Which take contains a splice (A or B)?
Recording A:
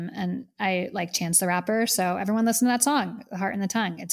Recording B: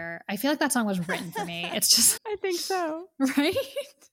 B